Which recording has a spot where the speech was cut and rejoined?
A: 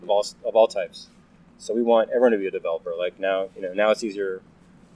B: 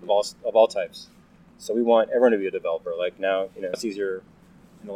B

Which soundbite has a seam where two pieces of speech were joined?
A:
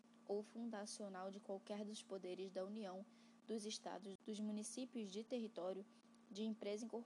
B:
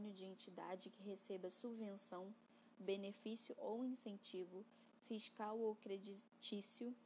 A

